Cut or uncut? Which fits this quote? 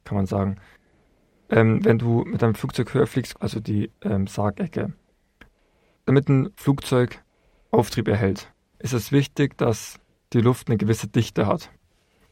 cut